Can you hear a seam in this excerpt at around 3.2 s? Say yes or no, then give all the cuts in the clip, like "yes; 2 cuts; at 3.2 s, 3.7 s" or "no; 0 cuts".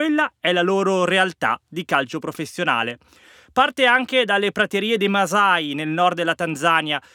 no; 0 cuts